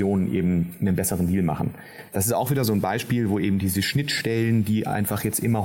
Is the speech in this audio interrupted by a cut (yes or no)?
no